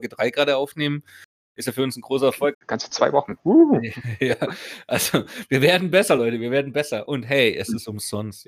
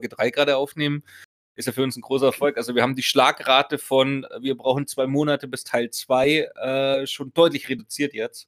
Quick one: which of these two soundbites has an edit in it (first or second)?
first